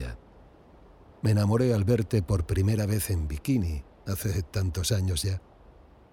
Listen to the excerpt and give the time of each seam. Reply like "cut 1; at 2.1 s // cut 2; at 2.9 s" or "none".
cut 1; at 1.1 s